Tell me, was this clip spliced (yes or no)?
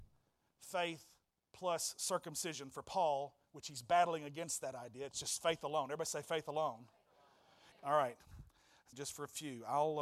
yes